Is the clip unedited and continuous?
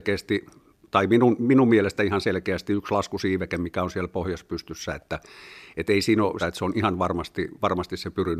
no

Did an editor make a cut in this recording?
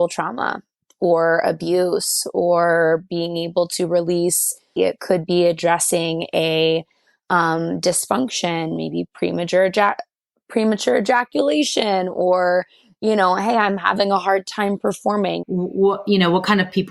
yes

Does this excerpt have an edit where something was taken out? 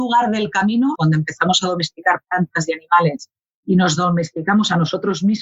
yes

